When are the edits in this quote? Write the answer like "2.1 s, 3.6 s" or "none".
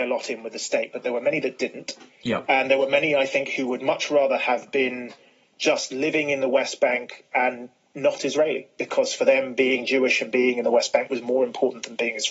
none